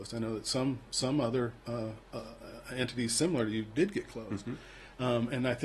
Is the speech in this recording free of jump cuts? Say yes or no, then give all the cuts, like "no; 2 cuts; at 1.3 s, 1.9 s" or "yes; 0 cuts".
yes; 0 cuts